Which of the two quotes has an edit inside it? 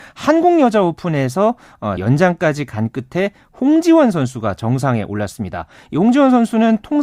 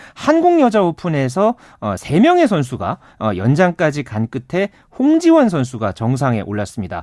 first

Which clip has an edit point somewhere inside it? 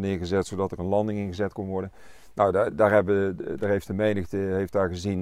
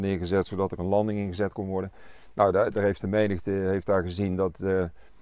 second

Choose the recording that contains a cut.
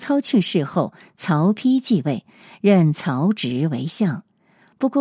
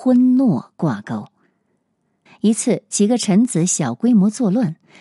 second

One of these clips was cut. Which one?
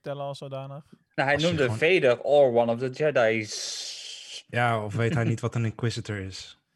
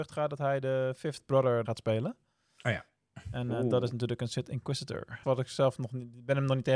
second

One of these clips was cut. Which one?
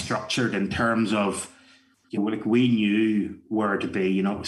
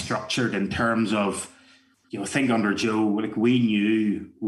first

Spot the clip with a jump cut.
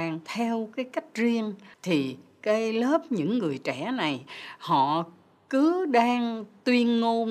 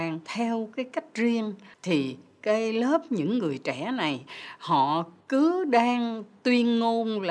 second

